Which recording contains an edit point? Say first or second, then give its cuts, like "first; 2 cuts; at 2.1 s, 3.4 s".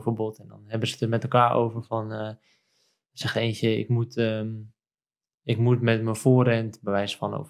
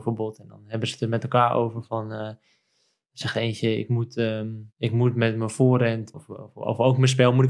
second; 2 cuts; at 4.7 s, 6.1 s